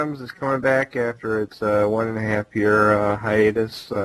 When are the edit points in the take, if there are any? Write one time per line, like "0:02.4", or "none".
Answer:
none